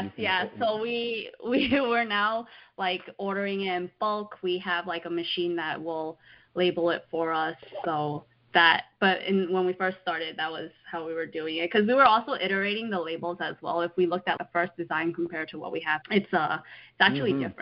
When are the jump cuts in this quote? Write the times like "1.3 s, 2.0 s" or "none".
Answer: 14.4 s, 16.0 s